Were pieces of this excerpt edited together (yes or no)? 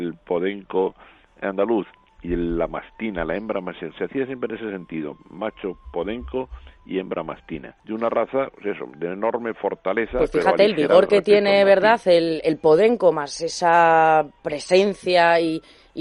yes